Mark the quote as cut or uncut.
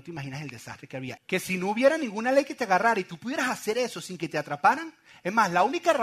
cut